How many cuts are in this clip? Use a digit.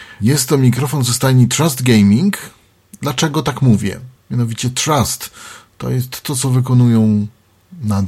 1